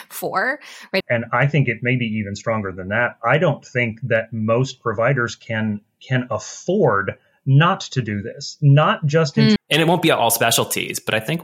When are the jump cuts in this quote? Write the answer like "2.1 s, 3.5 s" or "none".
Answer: 1.0 s, 9.6 s